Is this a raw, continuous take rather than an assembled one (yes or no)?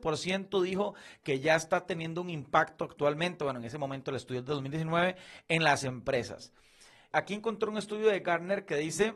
no